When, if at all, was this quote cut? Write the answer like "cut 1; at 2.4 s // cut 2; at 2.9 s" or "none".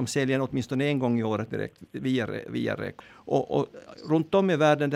cut 1; at 3.0 s